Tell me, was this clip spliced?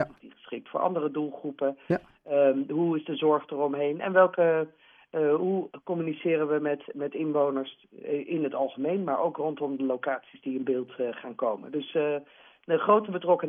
no; 0 cuts

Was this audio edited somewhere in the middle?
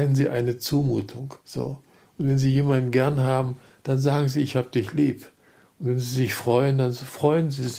yes; 1 cut; at 1.4 s

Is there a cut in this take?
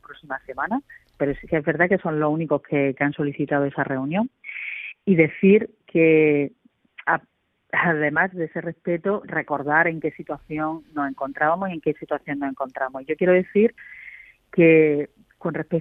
no; 0 cuts

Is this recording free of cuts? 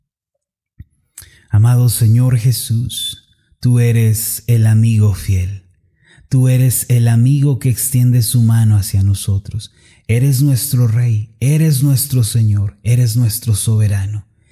yes; 0 cuts

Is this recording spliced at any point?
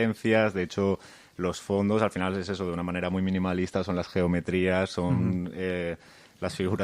no; 0 cuts

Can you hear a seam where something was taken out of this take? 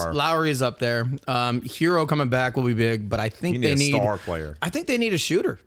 no; 0 cuts

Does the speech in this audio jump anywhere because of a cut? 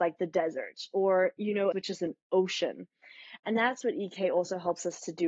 yes; 2 cuts; at 1.7 s, 3.4 s

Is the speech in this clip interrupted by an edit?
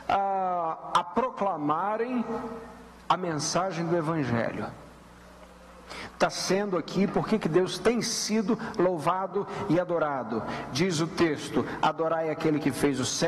yes; 1 cut; at 6.1 s

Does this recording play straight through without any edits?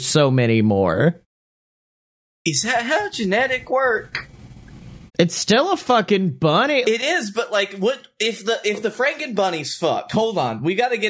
no; 2 cuts; at 5.1 s, 6.8 s

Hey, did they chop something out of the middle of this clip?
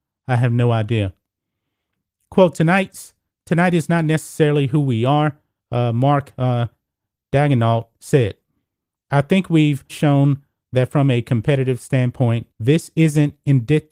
yes; 3 cuts; at 5.6 s, 9.9 s, 12.5 s

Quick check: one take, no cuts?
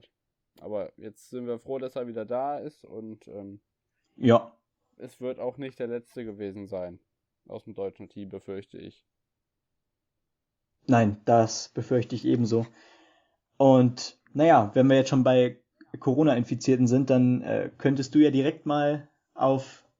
yes; 0 cuts

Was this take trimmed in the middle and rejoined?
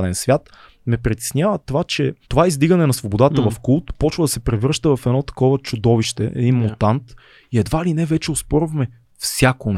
yes; 1 cut; at 2.2 s

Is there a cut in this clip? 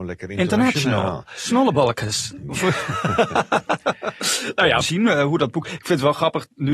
yes; 1 cut; at 4.8 s

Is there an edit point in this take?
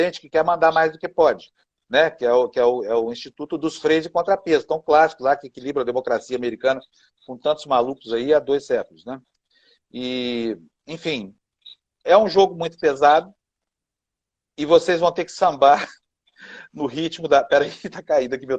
yes; 1 cut; at 12.0 s

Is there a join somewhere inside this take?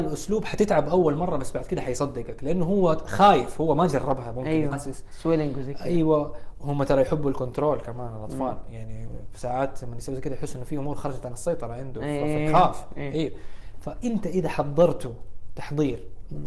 yes; 1 cut; at 4.7 s

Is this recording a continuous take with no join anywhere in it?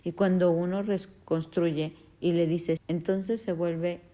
no; 1 cut; at 2.8 s

